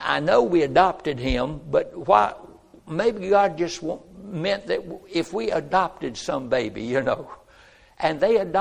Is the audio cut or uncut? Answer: uncut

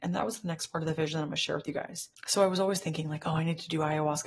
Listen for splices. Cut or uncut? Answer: uncut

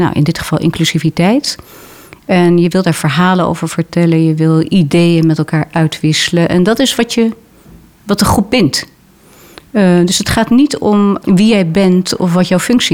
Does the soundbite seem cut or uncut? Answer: cut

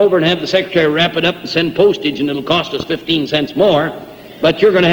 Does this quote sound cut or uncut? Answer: uncut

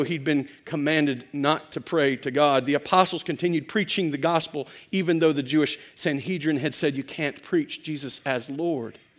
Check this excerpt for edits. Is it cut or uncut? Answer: uncut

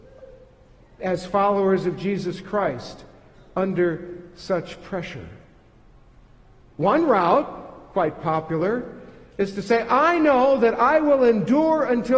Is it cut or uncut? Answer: cut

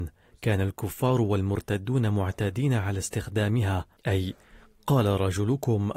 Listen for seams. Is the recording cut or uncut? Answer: cut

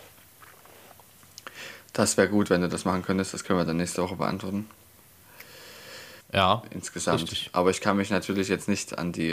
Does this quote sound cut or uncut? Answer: cut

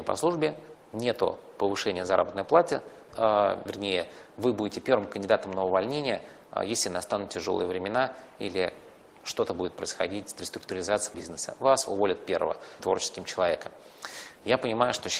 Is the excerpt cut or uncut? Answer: cut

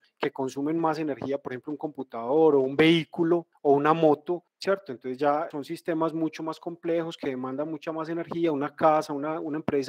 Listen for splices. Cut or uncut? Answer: uncut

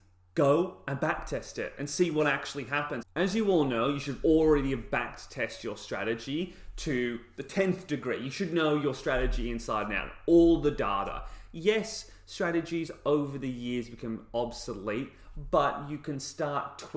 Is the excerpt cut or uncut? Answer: cut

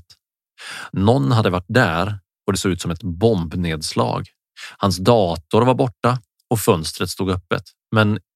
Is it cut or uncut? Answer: uncut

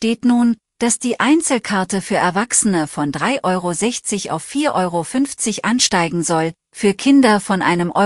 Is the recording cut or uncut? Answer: uncut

